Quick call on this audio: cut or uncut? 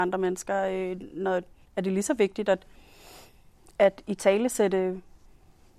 cut